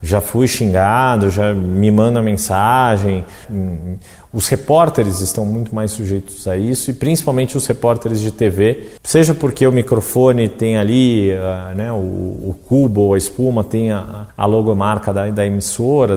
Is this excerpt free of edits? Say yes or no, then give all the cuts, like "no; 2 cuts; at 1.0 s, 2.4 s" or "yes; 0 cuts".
no; 1 cut; at 3.4 s